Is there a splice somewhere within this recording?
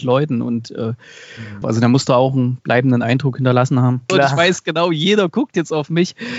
yes; 2 cuts; at 1.6 s, 4.1 s

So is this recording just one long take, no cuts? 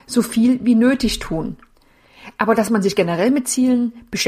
yes; 0 cuts

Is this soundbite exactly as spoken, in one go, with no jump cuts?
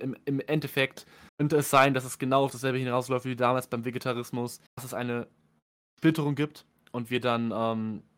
no; 2 cuts; at 1.3 s, 4.7 s

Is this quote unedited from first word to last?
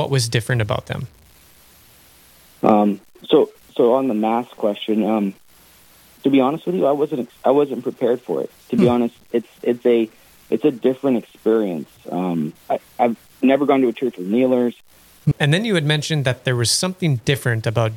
no; 3 cuts; at 8.6 s, 12.6 s, 15.3 s

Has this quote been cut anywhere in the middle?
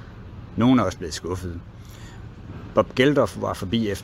no; 0 cuts

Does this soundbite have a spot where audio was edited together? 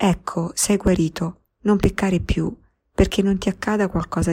no; 0 cuts

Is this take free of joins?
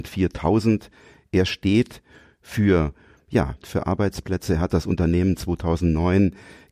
no; 1 cut; at 3.6 s

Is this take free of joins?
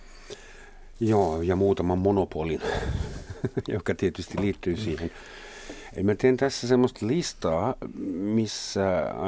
yes; 0 cuts

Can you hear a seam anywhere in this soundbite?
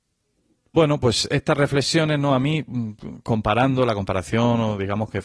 no; 0 cuts

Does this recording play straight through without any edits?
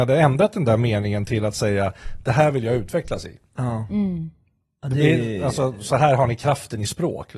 yes; 0 cuts

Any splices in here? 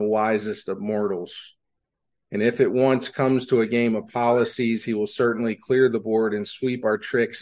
no; 0 cuts

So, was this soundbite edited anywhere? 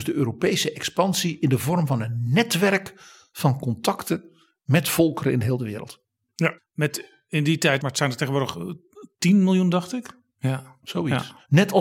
yes; 3 cuts; at 6.6 s, 7.8 s, 10.3 s

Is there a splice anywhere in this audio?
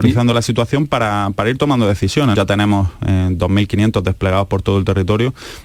yes; 1 cut; at 2.3 s

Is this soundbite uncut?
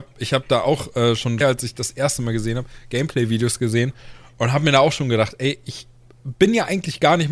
no; 1 cut; at 1.4 s

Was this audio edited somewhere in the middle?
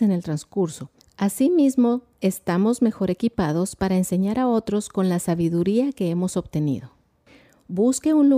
no; 0 cuts

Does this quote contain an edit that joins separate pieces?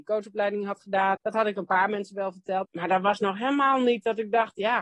yes; 2 cuts; at 1.1 s, 2.6 s

